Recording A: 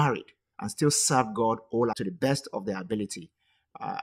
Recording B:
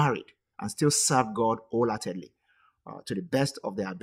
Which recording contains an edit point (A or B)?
A